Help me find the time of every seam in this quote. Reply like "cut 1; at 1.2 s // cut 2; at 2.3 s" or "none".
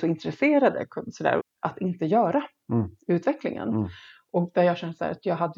cut 1; at 1.4 s

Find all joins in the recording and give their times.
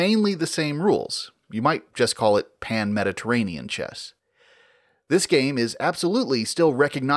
none

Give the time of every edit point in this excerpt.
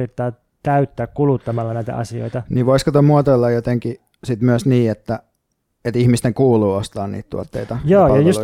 none

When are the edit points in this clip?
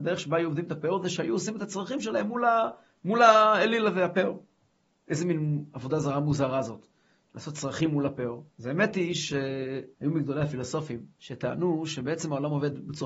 cut 1; at 8.5 s // cut 2; at 9.9 s // cut 3; at 11.1 s

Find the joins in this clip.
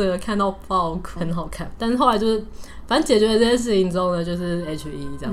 cut 1; at 1.2 s

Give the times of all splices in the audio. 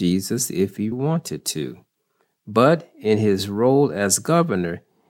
cut 1; at 0.9 s

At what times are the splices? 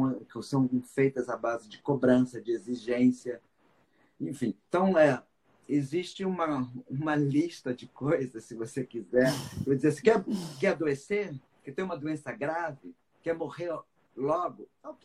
none

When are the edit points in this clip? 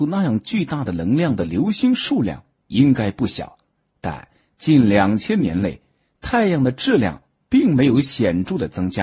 none

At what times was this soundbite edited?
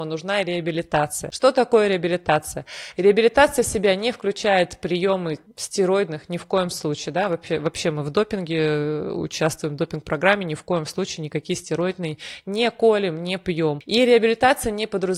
cut 1; at 2.9 s

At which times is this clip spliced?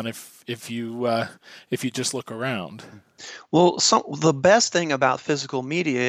none

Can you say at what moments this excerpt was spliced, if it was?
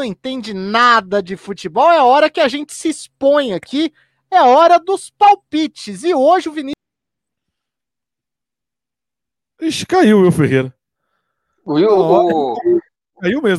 none

